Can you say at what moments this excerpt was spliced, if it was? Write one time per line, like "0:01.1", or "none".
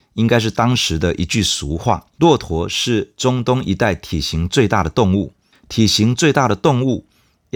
0:02.1
0:05.5